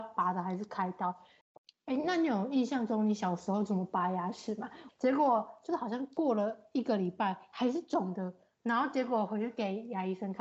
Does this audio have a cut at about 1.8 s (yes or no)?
no